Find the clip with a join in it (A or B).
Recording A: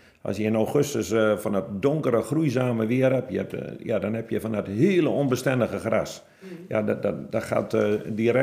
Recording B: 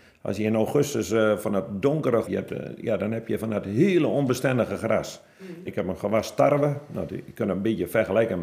B